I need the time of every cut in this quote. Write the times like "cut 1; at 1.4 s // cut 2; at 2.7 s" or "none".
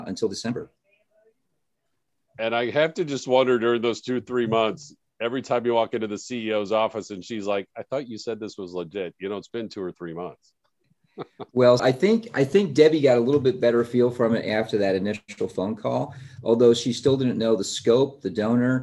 cut 1; at 11.8 s